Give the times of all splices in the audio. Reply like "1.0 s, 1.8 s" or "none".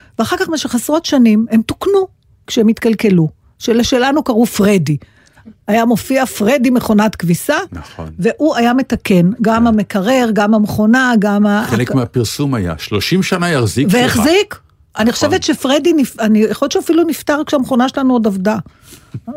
none